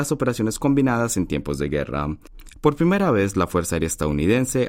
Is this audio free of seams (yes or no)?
no